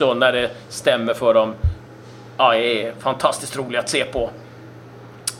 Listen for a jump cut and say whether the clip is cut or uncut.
uncut